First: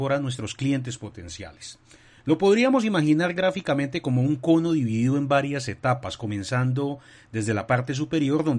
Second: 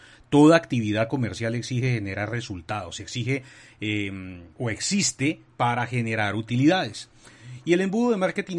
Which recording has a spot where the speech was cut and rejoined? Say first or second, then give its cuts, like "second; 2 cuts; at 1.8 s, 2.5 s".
second; 1 cut; at 4.5 s